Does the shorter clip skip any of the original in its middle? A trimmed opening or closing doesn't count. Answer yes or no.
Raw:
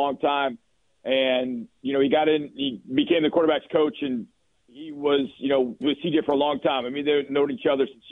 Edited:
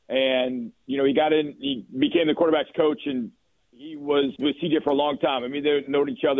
yes